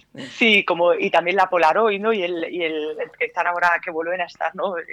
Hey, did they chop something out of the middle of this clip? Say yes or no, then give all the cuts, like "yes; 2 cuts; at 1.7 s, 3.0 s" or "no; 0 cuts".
no; 0 cuts